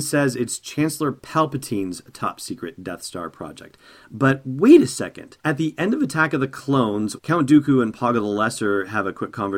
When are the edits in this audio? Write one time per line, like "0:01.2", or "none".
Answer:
0:05.4
0:07.2